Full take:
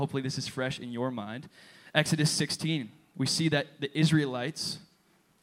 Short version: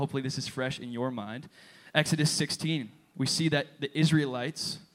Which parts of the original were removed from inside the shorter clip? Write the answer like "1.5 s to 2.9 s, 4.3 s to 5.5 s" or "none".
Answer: none